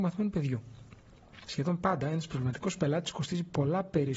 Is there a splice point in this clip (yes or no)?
yes